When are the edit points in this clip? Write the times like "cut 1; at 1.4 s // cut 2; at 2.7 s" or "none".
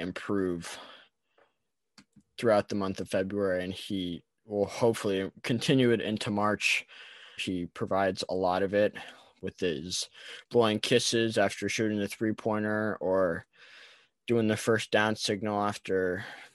cut 1; at 7.4 s